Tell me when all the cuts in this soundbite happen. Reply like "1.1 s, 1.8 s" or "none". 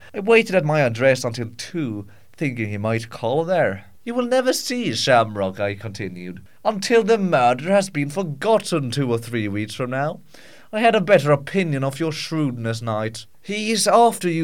3.9 s, 13.3 s

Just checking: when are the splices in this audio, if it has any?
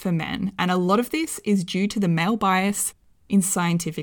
none

